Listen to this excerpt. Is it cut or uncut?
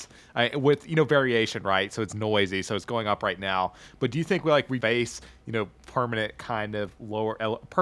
cut